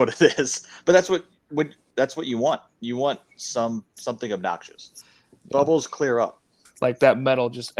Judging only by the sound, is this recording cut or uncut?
cut